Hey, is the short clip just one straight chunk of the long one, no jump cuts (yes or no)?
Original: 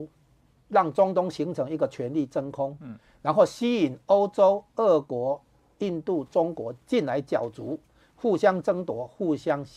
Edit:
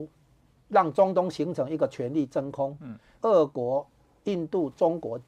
no